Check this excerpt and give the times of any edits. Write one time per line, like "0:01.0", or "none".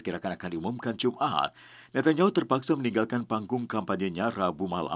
none